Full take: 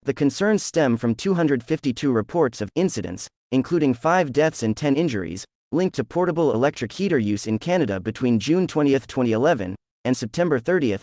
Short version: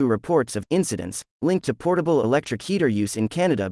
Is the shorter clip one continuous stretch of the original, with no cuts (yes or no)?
no